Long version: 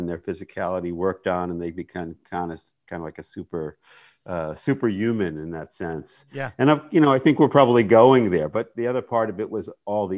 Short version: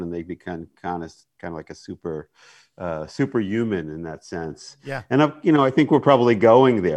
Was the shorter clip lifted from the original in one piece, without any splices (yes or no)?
yes